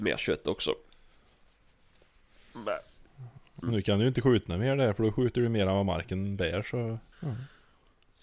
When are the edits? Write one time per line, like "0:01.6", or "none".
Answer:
0:03.6
0:07.1